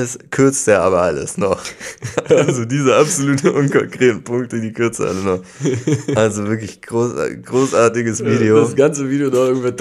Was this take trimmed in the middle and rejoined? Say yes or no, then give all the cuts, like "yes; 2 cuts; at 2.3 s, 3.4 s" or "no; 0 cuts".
no; 0 cuts